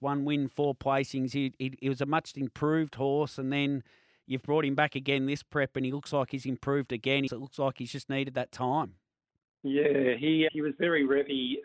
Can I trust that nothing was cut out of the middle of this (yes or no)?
no